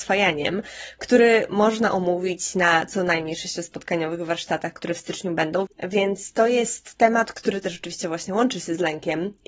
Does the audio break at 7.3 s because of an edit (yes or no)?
yes